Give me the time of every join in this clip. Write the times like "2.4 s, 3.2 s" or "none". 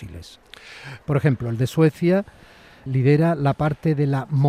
1.0 s, 2.9 s